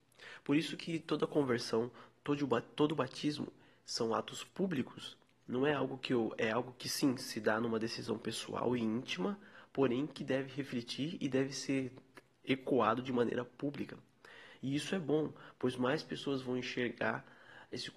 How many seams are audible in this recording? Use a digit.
1